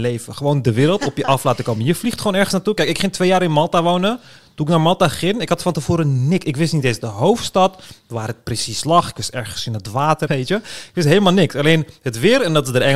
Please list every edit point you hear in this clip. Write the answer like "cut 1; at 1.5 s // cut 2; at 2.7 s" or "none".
cut 1; at 10.3 s